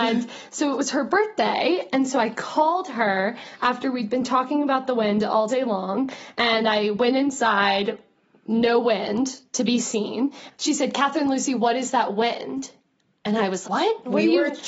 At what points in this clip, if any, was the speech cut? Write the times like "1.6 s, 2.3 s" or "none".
10.5 s, 13.6 s